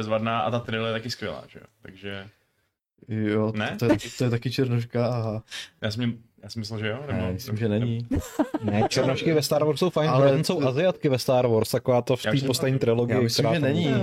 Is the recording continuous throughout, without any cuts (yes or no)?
yes